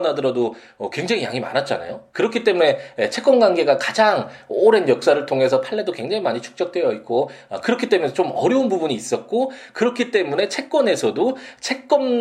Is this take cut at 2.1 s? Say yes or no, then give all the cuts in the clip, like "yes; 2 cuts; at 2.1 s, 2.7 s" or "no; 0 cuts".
yes; 1 cut; at 2.1 s